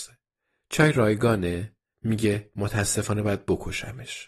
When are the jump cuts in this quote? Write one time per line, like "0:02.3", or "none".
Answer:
0:01.9